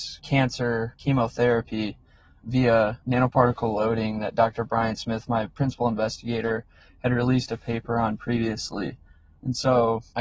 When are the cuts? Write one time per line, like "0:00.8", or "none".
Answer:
none